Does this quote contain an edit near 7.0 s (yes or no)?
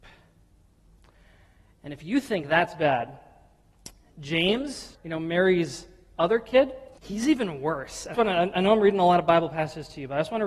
yes